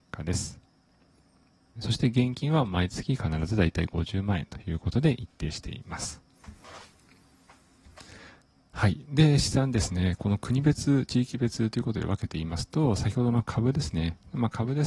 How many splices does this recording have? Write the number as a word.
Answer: one